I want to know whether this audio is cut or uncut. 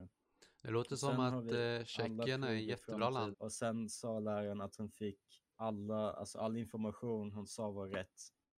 cut